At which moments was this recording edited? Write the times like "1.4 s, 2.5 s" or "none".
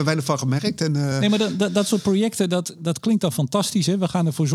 none